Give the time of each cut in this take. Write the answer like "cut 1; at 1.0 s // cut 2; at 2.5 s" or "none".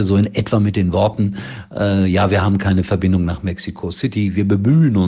none

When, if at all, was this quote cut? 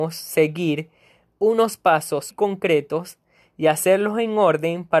cut 1; at 2.3 s

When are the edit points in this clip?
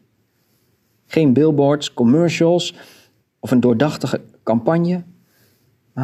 none

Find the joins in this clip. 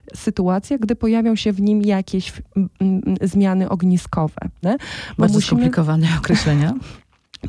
cut 1; at 4.6 s

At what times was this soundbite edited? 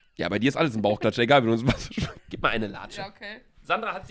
cut 1; at 2.2 s

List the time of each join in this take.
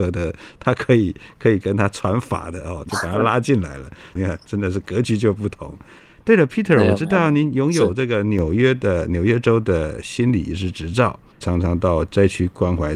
cut 1; at 2.9 s // cut 2; at 4.2 s // cut 3; at 11.4 s

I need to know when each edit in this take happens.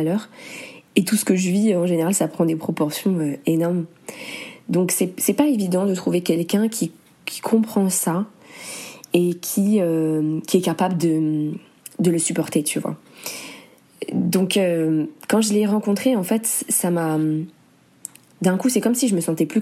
none

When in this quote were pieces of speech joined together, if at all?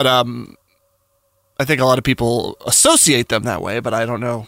none

